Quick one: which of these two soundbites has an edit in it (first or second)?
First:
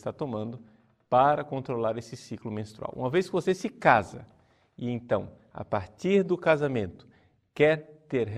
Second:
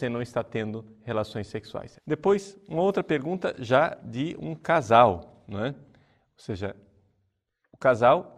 second